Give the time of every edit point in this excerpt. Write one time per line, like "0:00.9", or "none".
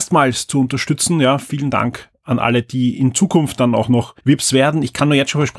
0:04.2